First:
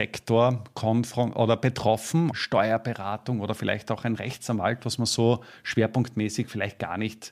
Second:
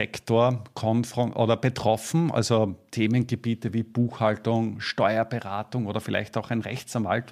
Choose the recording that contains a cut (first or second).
first